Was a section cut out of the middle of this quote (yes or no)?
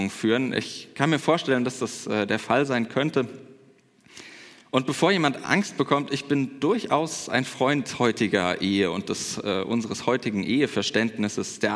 no